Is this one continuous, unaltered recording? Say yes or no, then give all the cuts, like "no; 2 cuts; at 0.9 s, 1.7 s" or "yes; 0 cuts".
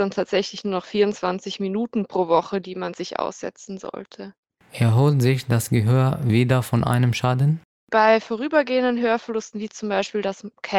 yes; 0 cuts